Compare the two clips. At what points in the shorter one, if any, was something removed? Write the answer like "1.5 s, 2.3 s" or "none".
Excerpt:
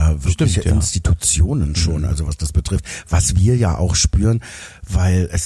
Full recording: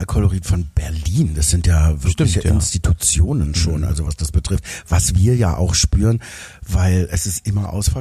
none